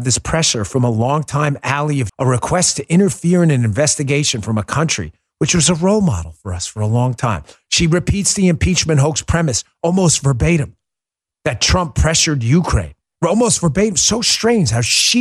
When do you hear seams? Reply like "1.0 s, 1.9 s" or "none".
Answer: 2.1 s